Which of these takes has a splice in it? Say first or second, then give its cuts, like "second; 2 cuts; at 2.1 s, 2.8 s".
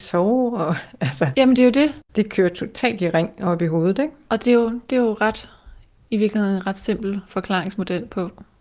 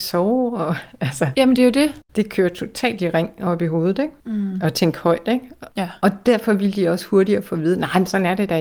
second; 2 cuts; at 4.2 s, 5.7 s